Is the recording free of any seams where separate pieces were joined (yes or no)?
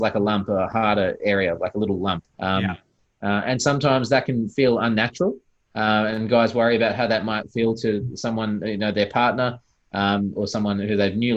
no